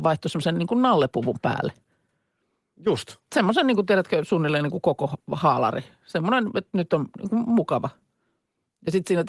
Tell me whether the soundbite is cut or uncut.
uncut